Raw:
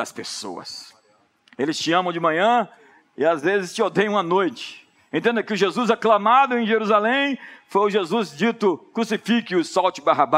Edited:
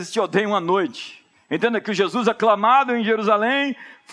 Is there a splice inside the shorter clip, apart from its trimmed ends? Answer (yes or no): no